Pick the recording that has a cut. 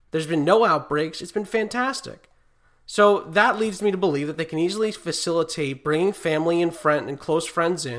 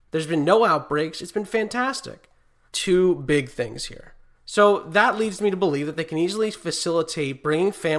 second; 2 cuts; at 2.7 s, 4.3 s

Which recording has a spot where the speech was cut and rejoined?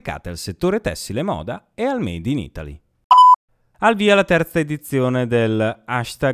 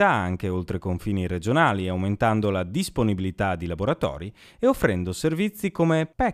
first; 1 cut; at 3.7 s

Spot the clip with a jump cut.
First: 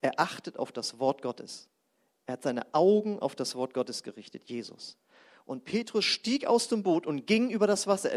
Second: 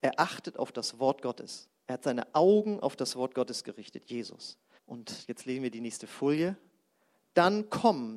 second; 2 cuts; at 1.8 s, 4.8 s

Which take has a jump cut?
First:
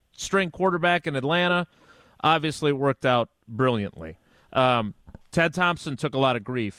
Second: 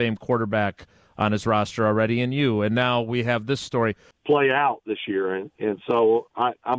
second; 1 cut; at 4.1 s

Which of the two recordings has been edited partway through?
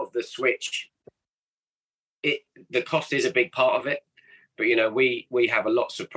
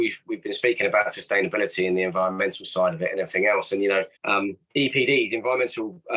second; 1 cut; at 4.2 s

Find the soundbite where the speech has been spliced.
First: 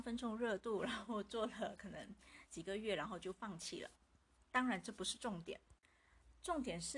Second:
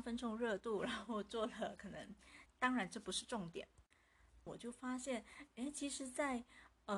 second; 2 cuts; at 2.5 s, 4.5 s

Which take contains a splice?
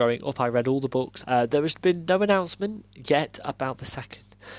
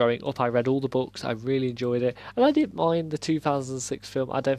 first; 1 cut; at 1.2 s

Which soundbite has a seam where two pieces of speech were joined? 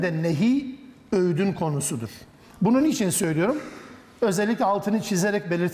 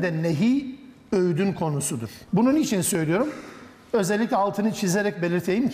second; 1 cut; at 2.3 s

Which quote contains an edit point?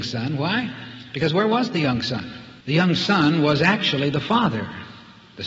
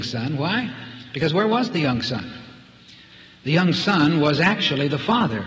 first; 1 cut; at 2.6 s

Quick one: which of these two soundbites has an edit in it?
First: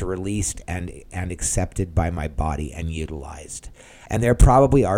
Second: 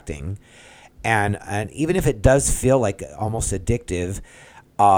first; 1 cut; at 4.1 s

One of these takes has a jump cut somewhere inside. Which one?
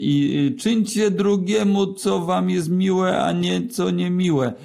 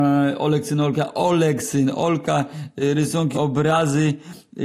second; 1 cut; at 3.3 s

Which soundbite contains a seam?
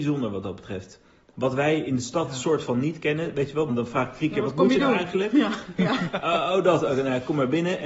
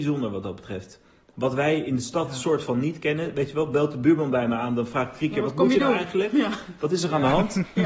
first; 2 cuts; at 3.7 s, 5.8 s

